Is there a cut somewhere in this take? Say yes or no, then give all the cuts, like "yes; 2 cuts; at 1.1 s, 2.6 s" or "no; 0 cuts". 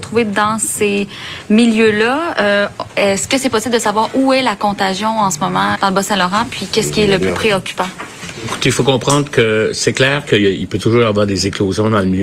yes; 1 cut; at 5.8 s